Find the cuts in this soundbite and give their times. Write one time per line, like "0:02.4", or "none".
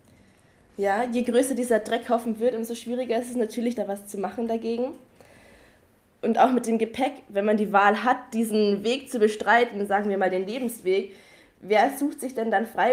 0:03.8